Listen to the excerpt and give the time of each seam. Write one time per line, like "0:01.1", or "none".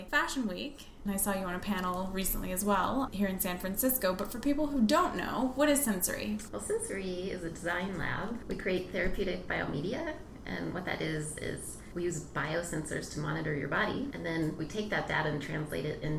none